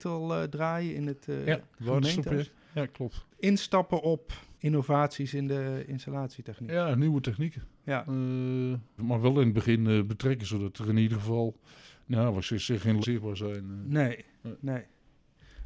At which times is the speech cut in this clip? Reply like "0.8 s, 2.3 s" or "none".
9.0 s, 13.0 s